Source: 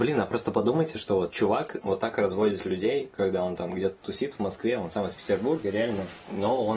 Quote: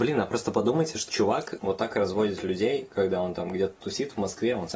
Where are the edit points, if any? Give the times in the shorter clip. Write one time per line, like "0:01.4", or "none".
0:01.1

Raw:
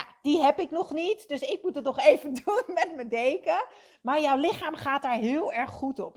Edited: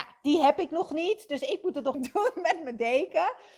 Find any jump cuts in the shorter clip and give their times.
0:01.9

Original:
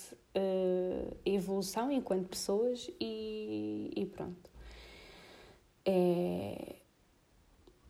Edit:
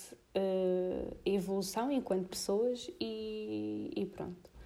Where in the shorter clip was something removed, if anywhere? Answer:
none

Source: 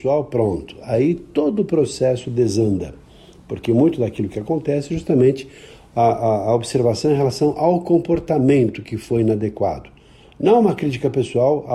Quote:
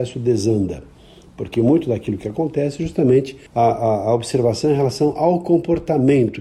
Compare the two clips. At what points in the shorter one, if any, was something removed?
0:03.5

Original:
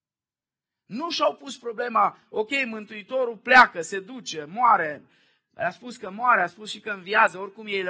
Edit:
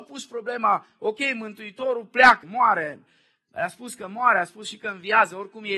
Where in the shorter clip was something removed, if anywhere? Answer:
0:02.4

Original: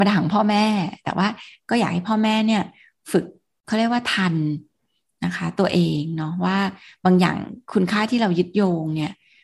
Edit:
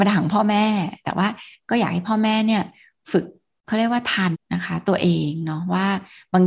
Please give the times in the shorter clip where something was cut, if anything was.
0:04.3

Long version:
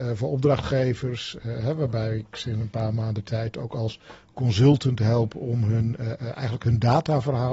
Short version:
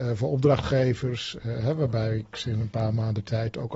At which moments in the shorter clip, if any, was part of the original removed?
none

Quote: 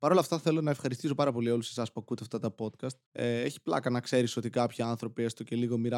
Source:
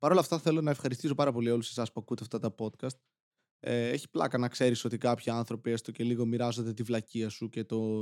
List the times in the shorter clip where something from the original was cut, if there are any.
0:03.0

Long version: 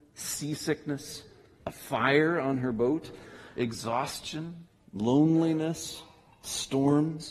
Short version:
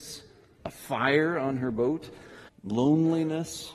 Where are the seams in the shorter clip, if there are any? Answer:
0:02.5

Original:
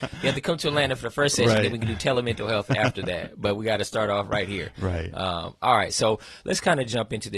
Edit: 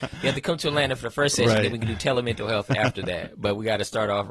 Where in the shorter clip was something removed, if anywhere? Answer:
none

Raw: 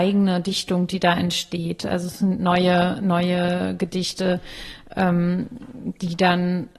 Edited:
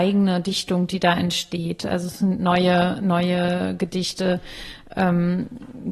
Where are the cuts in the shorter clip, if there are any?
none

